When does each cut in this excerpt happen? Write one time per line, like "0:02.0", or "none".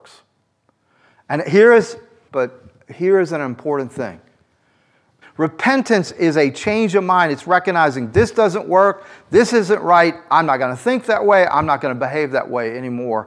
0:02.3
0:05.2